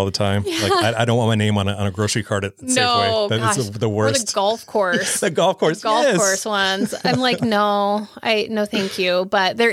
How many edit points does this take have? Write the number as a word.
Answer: zero